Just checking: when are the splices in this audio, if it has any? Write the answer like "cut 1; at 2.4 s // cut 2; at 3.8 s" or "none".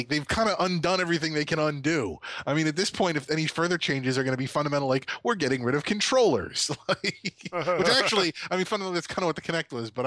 none